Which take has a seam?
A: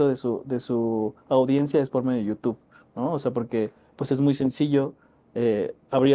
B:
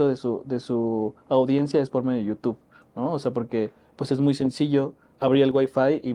B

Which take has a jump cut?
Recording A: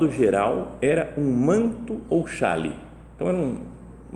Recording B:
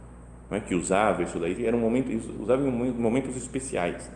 B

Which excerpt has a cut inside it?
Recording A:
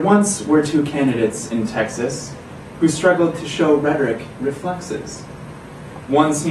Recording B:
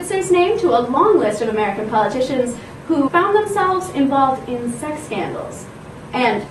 B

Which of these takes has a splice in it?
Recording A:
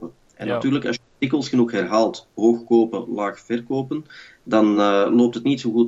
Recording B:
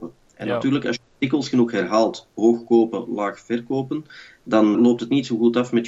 B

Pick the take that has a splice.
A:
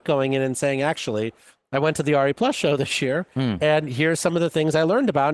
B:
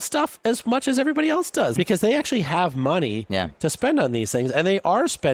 B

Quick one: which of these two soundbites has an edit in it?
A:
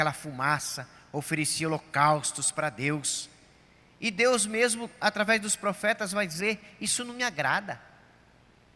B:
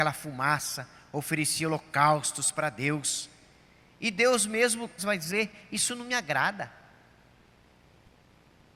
B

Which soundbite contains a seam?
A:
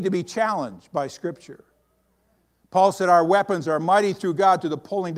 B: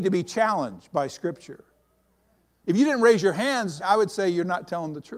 B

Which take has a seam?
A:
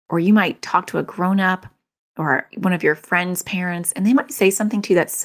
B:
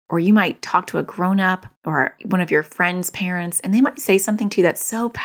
B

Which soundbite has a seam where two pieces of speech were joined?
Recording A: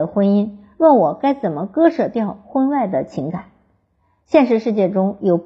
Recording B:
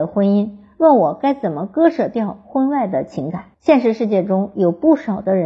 B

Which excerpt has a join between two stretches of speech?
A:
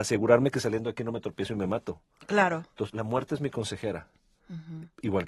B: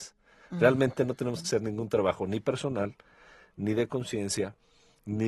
A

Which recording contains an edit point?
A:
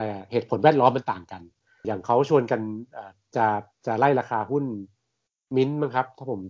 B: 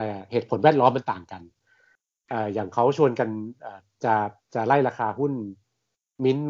A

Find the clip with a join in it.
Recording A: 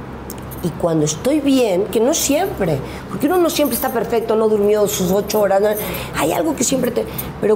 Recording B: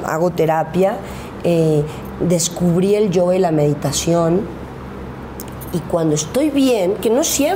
B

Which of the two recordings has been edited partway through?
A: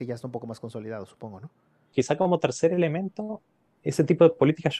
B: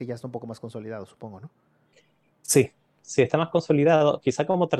A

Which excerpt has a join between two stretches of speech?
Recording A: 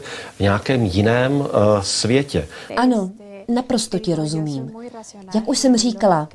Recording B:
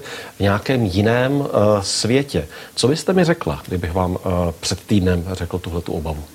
A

